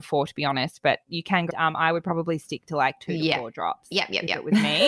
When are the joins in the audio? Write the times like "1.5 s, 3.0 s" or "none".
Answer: 1.5 s